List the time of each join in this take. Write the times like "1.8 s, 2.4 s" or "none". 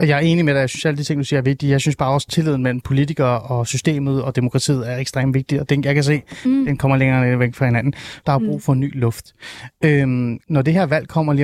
8.2 s, 10.4 s